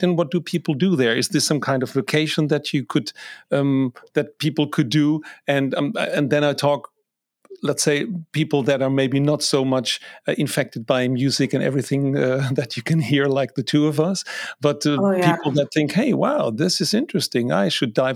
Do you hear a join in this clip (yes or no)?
no